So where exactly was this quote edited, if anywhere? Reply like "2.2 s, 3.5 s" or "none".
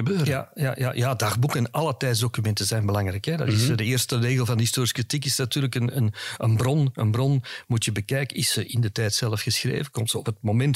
none

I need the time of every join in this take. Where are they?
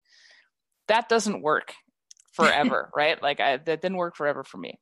none

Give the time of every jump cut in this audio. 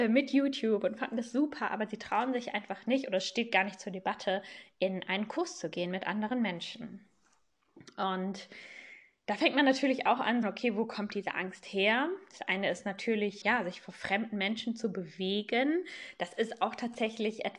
10.4 s, 13.4 s

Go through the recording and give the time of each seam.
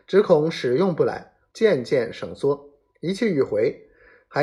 1.5 s

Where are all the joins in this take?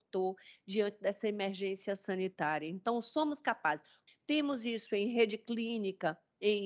4.1 s

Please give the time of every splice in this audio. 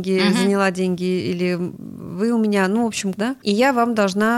3.1 s

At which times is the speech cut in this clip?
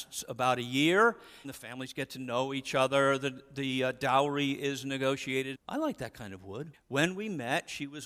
1.4 s, 5.5 s, 6.7 s

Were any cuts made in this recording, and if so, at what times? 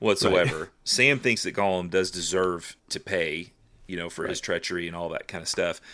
2.8 s

